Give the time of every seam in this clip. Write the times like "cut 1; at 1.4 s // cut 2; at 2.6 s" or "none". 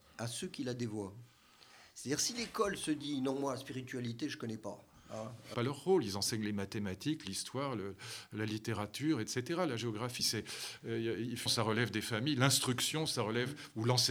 cut 1; at 5.5 s // cut 2; at 10.2 s // cut 3; at 11.5 s